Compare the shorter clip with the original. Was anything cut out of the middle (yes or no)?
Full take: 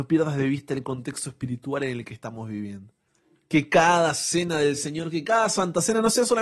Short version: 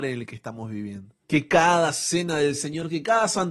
yes